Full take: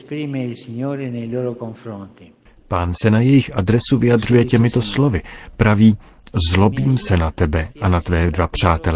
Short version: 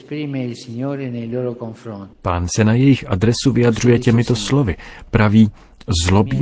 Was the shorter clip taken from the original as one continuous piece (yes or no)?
no